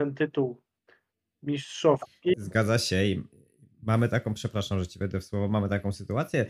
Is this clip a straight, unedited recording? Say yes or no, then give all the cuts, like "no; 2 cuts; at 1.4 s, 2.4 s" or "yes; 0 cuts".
no; 1 cut; at 2.3 s